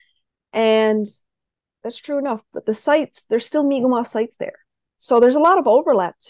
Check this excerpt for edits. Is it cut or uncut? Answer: cut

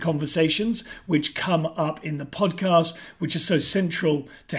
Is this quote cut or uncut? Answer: uncut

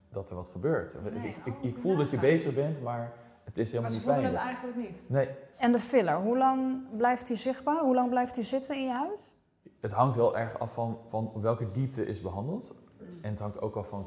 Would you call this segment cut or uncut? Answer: cut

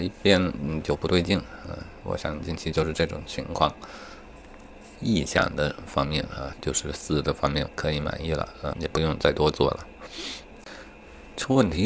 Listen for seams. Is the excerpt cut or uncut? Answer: cut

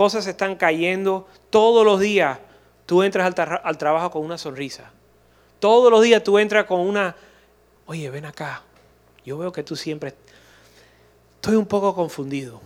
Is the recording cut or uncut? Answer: cut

